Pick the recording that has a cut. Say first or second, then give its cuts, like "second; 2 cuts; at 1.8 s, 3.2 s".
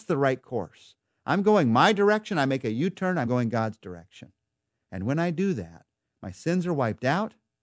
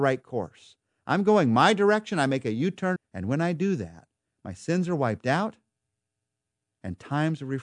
second; 1 cut; at 3.0 s